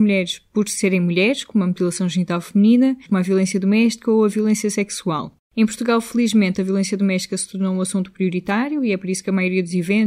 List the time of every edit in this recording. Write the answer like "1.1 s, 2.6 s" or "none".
3.0 s